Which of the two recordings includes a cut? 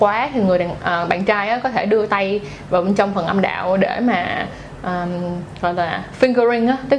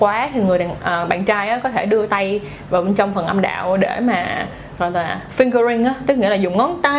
second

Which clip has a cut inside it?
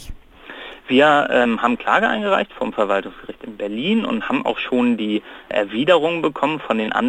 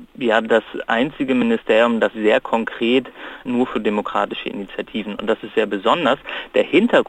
second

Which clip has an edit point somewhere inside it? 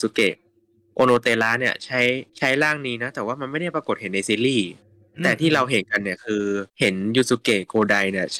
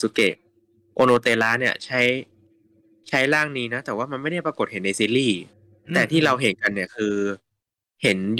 first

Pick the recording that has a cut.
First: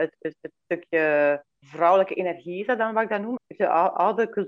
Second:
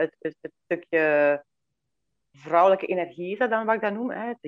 first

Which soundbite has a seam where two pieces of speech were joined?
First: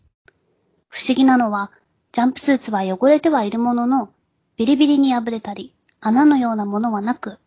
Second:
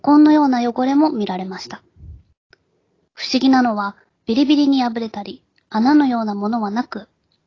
second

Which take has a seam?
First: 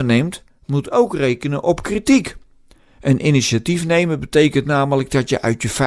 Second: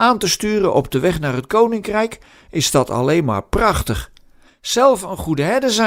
second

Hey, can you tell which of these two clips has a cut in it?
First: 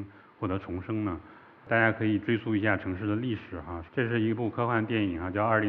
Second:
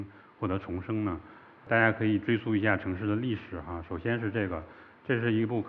first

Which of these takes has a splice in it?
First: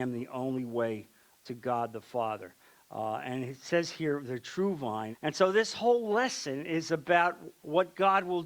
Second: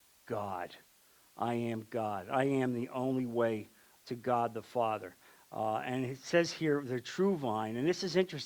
first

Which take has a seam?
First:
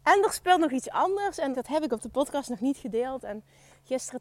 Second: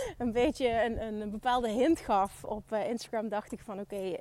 first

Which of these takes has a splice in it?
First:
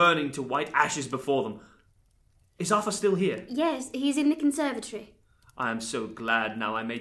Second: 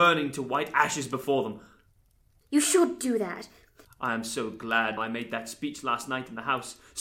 second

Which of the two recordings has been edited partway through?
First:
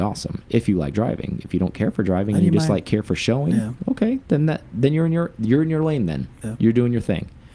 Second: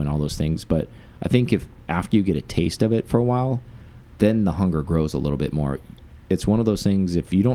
first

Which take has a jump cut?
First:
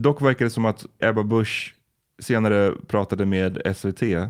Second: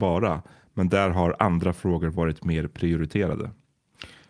first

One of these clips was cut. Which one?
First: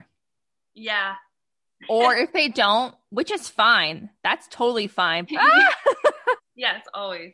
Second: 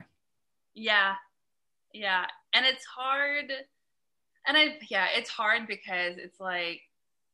first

